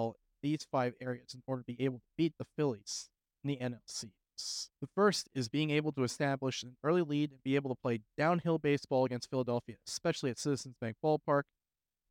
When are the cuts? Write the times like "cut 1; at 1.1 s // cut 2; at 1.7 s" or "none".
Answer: cut 1; at 4.8 s